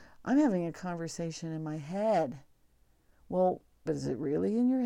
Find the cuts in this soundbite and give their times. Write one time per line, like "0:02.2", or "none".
0:03.9

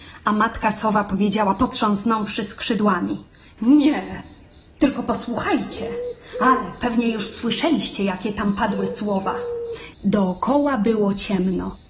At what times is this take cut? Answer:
0:09.9

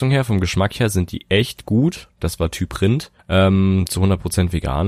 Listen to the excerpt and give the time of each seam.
0:03.2

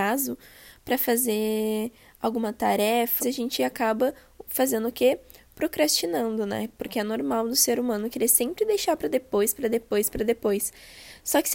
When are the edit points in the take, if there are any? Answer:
0:03.2

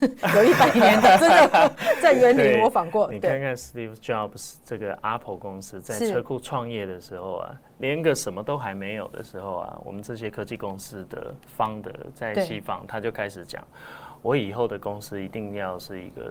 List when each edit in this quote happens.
none

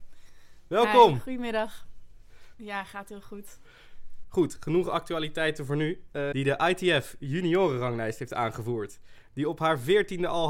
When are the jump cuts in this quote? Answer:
0:02.5
0:04.2
0:06.3

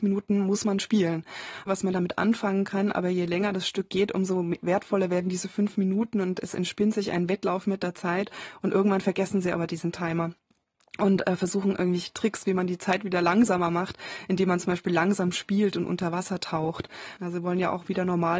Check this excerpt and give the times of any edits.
0:01.7
0:17.2

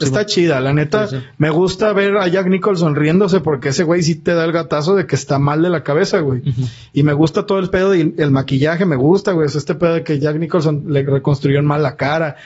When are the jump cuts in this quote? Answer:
none

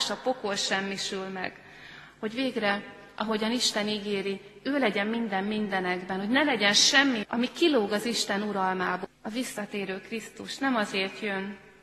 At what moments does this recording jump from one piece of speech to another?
0:07.2
0:09.0

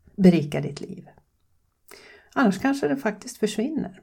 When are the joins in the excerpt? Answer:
none

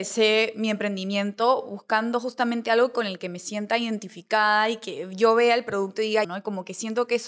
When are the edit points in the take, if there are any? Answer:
0:06.2

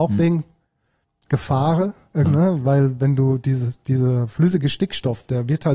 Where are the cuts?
0:02.3

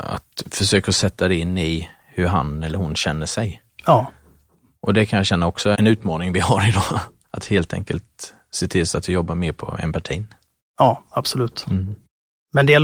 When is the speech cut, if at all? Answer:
0:05.7

